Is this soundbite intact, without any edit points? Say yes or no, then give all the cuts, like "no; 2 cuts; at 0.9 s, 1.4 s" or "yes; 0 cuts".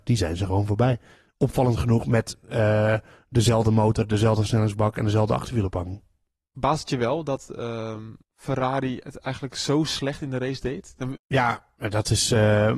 no; 2 cuts; at 8.2 s, 11.2 s